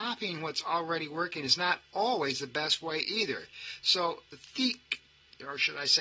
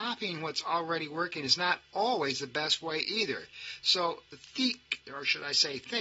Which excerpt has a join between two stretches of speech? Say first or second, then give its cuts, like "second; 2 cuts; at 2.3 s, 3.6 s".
second; 1 cut; at 5.0 s